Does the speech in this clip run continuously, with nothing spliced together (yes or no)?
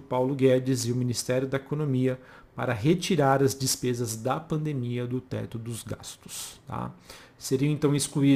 yes